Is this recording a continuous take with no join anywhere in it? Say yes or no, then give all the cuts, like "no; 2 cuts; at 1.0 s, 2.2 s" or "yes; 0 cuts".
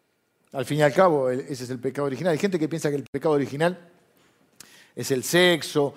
yes; 0 cuts